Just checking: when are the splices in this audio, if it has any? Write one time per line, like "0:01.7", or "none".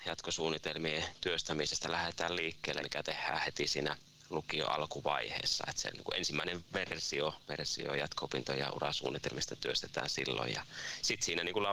0:02.8
0:07.4